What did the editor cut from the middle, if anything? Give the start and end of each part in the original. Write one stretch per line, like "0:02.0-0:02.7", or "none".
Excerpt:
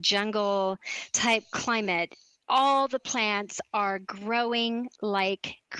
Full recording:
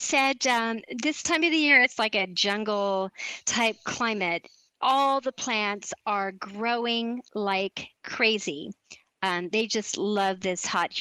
none